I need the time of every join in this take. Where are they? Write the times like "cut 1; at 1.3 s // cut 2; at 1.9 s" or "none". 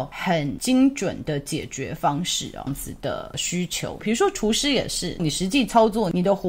cut 1; at 2.7 s // cut 2; at 4.0 s // cut 3; at 5.2 s